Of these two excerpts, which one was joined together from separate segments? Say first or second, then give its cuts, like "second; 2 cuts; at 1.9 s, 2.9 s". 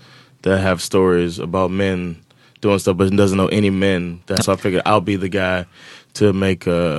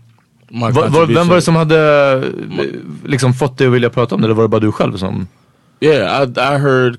first; 1 cut; at 4.4 s